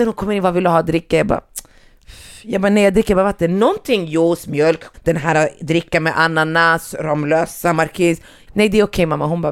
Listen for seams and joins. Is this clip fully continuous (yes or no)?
no